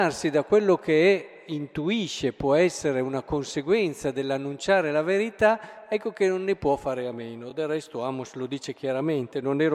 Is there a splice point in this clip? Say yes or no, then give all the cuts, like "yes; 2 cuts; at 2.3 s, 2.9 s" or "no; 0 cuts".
no; 0 cuts